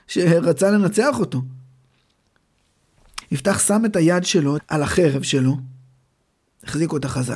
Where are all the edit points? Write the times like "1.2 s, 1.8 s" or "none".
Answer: 3.2 s, 4.6 s